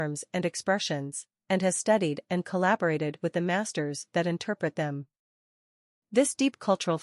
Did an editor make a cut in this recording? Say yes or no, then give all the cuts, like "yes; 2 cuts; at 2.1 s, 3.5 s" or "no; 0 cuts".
no; 0 cuts